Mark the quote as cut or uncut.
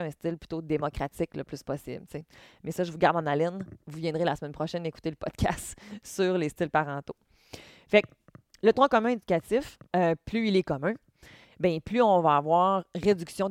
cut